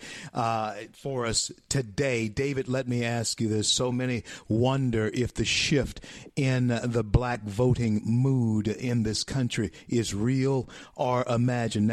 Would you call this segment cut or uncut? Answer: uncut